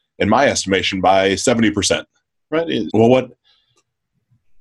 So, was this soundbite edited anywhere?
yes; 1 cut; at 2.9 s

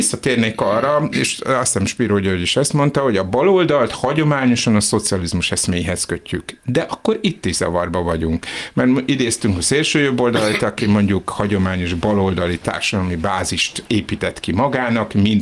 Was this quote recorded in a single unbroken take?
yes; 0 cuts

